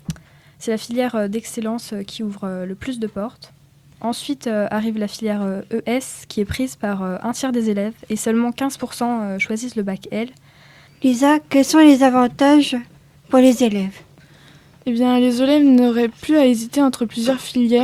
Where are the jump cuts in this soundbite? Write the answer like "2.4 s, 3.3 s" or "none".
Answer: 10.9 s